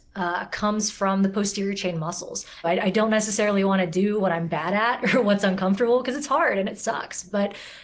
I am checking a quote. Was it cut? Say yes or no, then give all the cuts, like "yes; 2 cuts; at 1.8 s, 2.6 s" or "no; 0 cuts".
yes; 1 cut; at 2.6 s